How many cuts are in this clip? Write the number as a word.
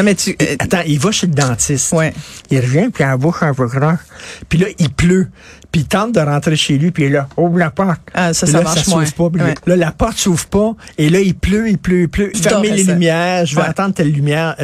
two